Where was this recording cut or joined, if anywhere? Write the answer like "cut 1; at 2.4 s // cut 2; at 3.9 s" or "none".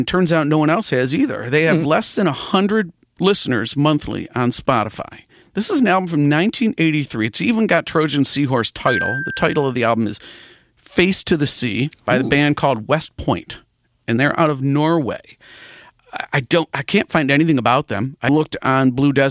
cut 1; at 18.3 s